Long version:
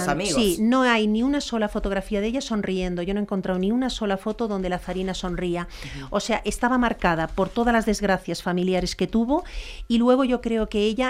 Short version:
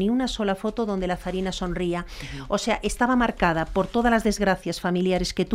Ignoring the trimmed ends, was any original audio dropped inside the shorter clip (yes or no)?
no